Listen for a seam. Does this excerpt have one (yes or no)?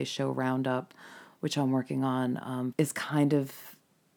yes